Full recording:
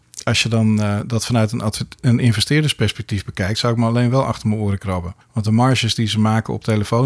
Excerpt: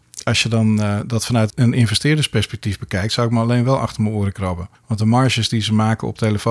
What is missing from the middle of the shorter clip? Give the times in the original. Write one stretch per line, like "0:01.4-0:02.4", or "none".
0:01.5-0:02.0